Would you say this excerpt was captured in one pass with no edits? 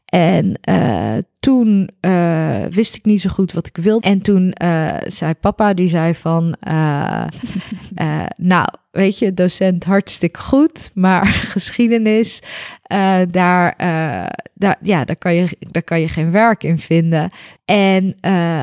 no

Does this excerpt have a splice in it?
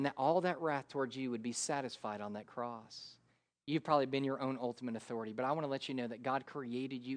yes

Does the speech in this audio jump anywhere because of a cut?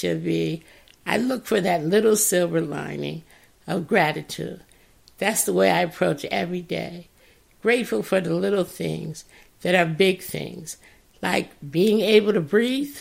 no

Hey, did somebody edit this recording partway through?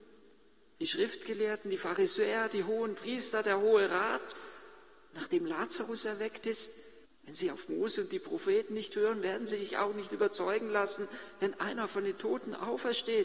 yes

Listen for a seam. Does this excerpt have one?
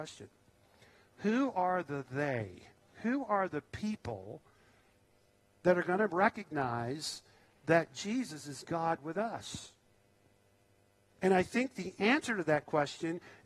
yes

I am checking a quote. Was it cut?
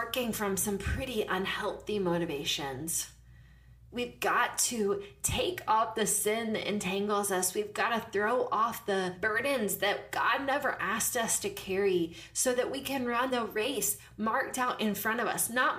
no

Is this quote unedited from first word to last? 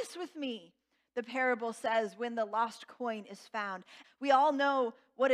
no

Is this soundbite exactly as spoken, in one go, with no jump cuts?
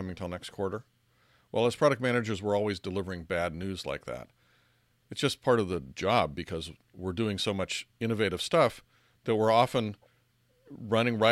yes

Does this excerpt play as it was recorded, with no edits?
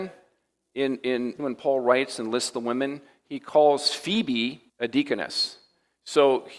no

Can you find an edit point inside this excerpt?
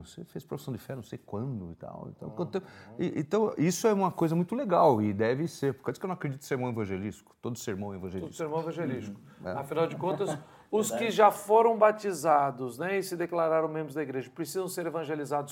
no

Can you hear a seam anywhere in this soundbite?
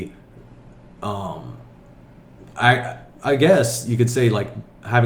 no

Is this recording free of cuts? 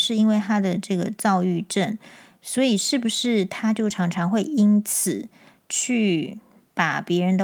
yes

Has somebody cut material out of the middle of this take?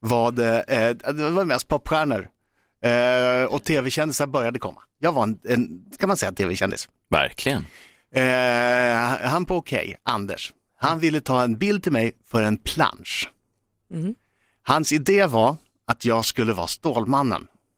no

